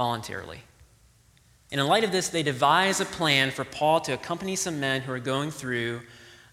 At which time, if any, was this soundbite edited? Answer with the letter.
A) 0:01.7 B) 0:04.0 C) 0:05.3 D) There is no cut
A